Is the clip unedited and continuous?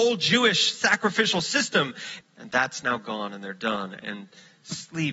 no; 1 cut; at 2.2 s

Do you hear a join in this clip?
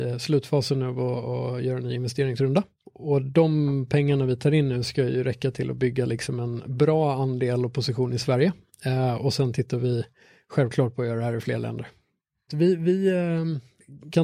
yes; 2 cuts; at 2.8 s, 12.5 s

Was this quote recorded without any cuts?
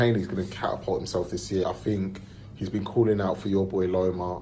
no; 1 cut; at 1.6 s

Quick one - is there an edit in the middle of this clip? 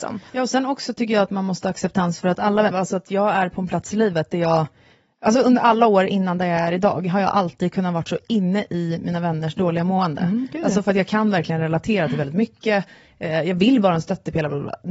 yes; 1 cut; at 2.7 s

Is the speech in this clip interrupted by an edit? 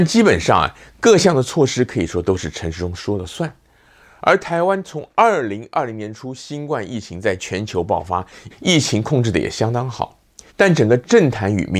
yes; 2 cuts; at 8.5 s, 10.5 s

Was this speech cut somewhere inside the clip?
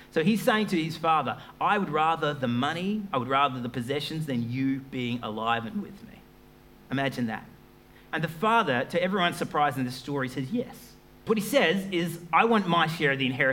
yes; 1 cut; at 11.3 s

